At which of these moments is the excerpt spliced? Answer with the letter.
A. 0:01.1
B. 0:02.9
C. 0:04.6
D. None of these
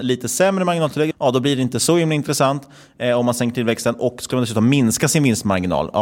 A